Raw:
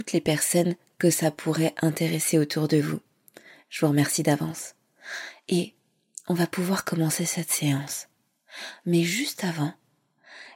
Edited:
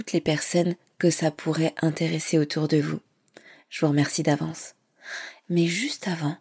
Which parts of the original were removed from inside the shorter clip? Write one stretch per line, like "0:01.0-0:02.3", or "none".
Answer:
0:05.4-0:08.8